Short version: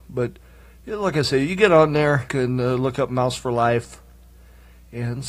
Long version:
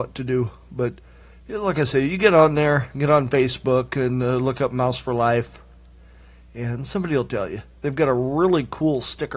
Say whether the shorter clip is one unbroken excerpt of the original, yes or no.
no